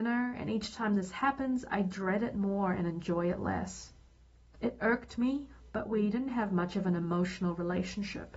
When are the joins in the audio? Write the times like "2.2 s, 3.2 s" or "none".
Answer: 4.6 s

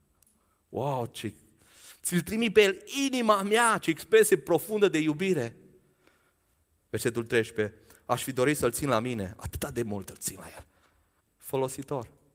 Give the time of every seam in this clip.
6.9 s, 11.2 s

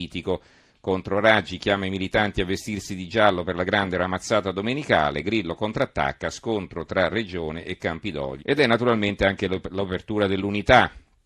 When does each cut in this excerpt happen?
8.4 s

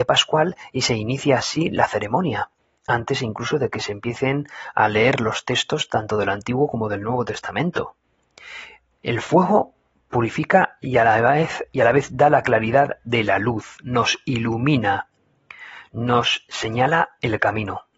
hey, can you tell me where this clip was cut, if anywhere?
none

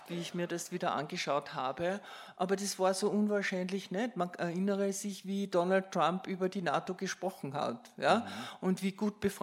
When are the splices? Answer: none

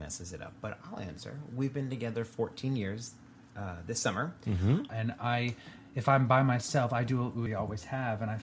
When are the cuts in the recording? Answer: 4.9 s, 7.5 s

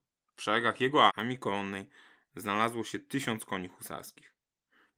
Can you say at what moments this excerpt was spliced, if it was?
1.1 s

